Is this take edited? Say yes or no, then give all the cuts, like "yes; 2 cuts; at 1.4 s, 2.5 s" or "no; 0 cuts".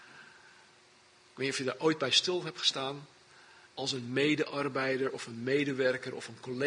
yes; 1 cut; at 3.7 s